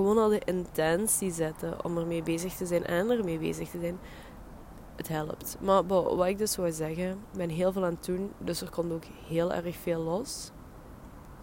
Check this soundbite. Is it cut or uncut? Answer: uncut